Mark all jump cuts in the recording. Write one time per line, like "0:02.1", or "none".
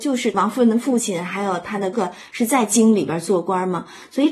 0:01.9